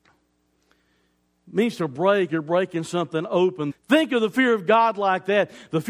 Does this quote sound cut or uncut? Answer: cut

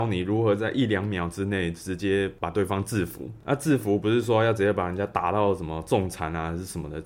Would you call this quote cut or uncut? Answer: uncut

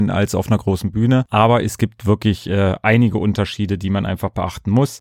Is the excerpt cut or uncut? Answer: uncut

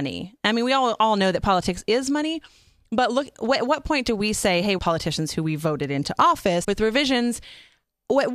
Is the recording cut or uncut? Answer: cut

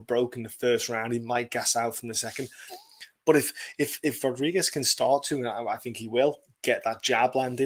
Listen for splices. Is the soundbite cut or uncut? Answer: uncut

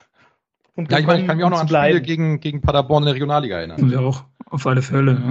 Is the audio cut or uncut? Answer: cut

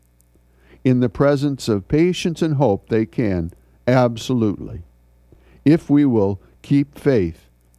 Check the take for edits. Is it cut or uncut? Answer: uncut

